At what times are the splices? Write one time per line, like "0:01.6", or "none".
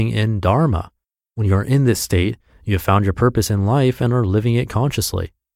none